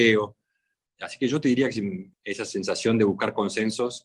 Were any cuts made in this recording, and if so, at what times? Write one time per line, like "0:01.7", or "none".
0:02.1